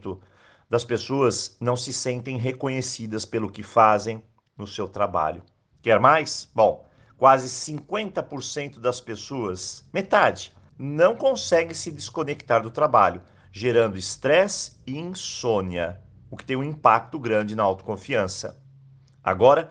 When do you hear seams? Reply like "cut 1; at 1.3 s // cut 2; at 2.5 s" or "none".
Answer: cut 1; at 5.7 s // cut 2; at 10.7 s // cut 3; at 17.1 s